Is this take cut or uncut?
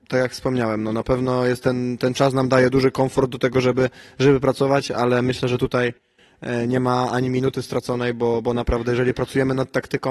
uncut